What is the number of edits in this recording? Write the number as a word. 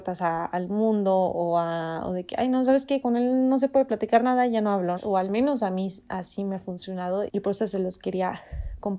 two